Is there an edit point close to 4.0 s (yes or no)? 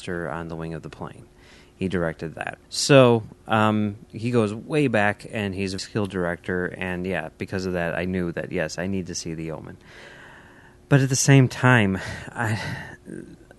no